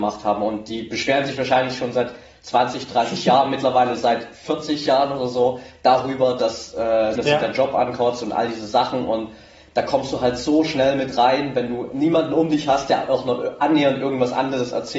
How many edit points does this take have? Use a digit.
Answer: 1